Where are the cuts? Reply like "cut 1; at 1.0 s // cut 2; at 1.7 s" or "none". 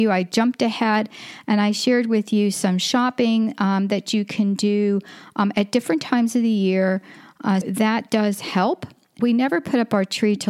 cut 1; at 7.6 s // cut 2; at 9.2 s